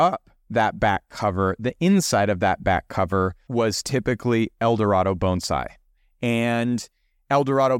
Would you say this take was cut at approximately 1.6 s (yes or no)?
no